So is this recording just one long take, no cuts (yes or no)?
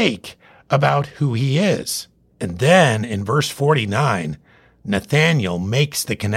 no